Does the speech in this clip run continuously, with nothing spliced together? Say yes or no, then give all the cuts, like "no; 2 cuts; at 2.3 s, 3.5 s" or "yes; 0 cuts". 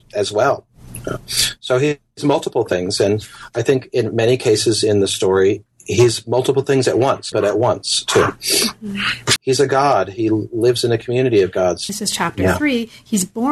no; 3 cuts; at 7.3 s, 9.4 s, 11.9 s